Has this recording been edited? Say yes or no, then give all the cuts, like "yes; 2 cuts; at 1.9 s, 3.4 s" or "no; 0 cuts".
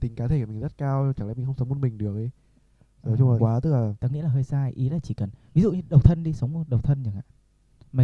yes; 1 cut; at 3.4 s